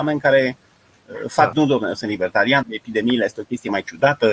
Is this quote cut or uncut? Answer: cut